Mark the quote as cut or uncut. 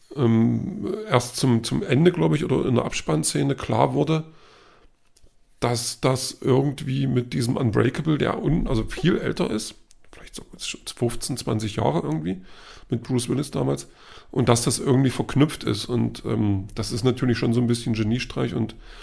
uncut